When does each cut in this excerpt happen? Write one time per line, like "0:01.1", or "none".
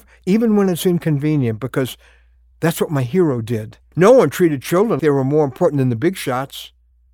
0:03.9
0:05.0